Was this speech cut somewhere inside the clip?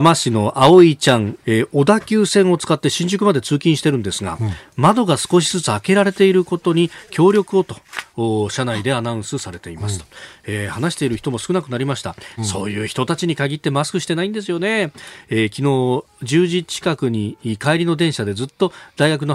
yes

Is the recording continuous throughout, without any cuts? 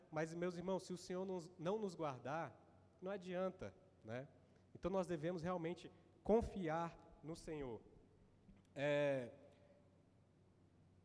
yes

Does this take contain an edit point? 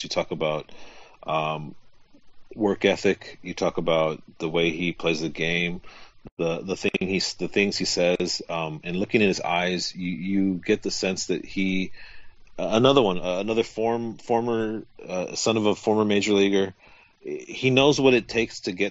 no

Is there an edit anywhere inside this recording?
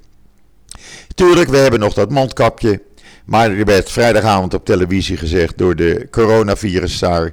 no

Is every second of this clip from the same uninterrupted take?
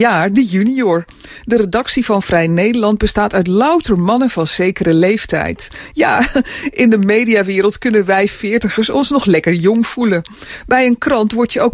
yes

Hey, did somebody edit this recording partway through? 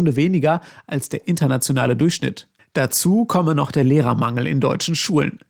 no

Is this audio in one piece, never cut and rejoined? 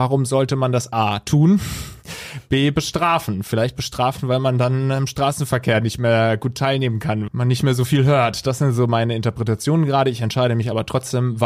no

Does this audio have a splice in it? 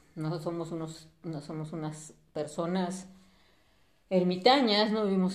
no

